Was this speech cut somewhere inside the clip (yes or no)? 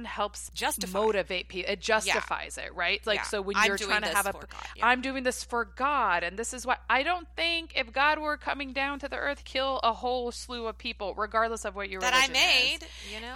yes